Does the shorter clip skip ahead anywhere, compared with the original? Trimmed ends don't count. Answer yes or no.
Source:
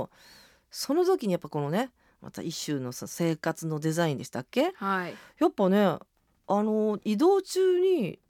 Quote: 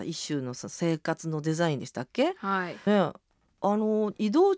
yes